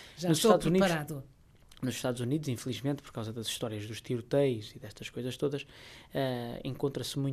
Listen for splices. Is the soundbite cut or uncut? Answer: uncut